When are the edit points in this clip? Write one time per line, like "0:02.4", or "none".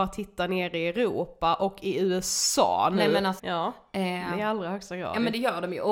0:03.4